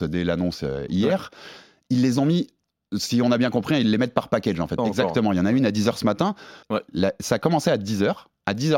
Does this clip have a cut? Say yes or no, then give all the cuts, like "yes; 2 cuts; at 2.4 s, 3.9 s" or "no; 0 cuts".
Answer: yes; 2 cuts; at 4.8 s, 6.6 s